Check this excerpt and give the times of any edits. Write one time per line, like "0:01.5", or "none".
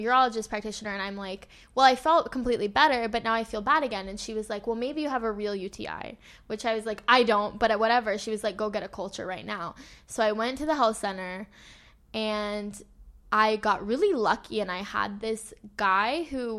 0:13.2